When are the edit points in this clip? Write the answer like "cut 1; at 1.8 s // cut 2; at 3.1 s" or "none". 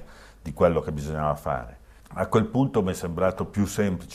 cut 1; at 2.0 s